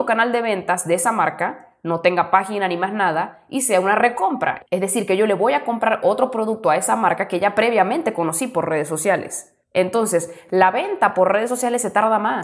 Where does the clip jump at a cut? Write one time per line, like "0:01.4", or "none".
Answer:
none